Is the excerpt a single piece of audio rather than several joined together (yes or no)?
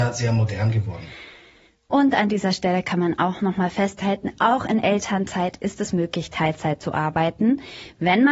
yes